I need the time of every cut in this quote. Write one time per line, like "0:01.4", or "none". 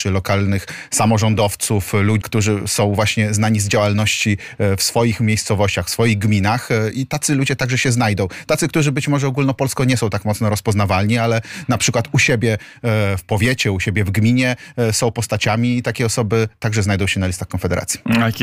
0:02.2